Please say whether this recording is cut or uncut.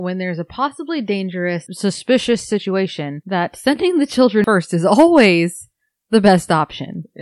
uncut